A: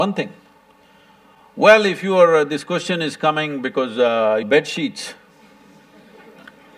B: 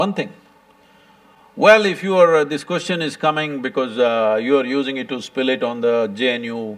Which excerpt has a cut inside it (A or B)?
A